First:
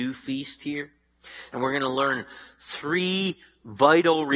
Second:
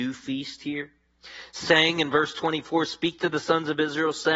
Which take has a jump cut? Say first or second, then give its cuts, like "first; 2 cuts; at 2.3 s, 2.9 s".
first; 1 cut; at 1.5 s